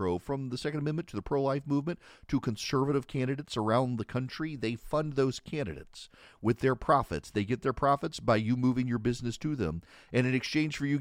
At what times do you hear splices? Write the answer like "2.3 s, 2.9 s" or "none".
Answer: none